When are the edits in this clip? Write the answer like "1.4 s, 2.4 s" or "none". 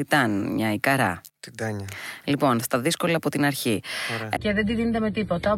1.3 s, 2.6 s, 4.4 s